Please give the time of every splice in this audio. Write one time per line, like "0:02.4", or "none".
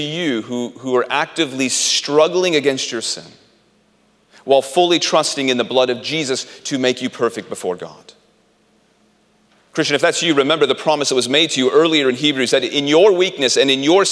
none